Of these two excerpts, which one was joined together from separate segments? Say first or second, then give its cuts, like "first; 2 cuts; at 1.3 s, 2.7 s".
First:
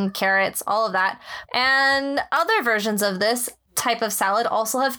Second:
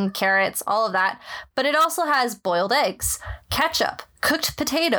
first; 1 cut; at 1.5 s